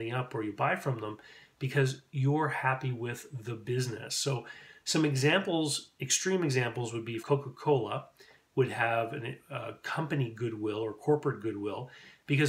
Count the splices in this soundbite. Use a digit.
1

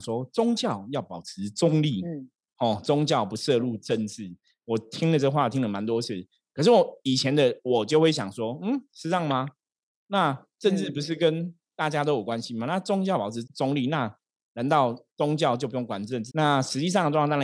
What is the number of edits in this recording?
3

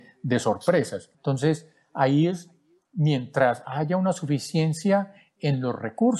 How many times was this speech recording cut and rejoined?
1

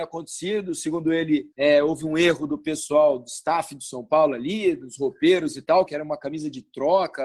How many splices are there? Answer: 2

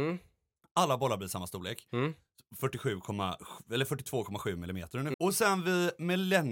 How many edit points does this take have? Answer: 1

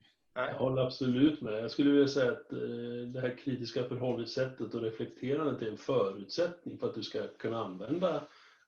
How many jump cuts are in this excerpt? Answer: 0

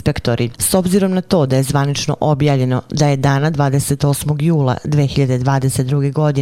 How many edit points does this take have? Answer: 0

